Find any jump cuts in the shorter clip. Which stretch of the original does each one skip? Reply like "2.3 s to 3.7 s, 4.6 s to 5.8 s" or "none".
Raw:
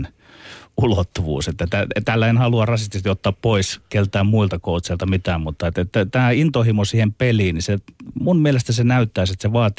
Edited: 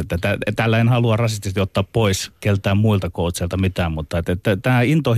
none